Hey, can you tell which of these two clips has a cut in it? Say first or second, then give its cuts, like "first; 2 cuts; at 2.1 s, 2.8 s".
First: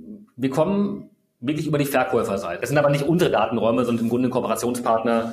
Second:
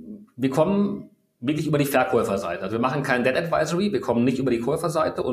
first; 1 cut; at 2.6 s